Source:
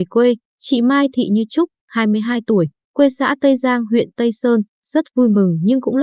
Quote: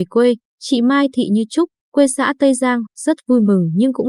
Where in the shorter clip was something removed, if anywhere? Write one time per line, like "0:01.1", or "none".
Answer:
0:01.8
0:02.9